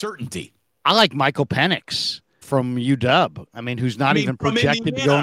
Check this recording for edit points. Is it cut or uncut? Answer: cut